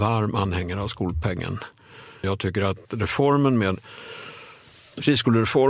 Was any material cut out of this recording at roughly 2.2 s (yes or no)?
yes